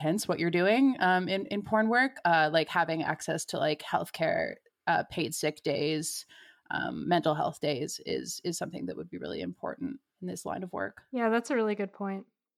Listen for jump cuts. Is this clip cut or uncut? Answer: uncut